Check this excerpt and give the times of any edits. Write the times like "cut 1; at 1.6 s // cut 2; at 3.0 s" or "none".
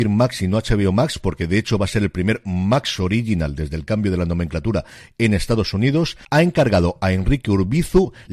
cut 1; at 6.2 s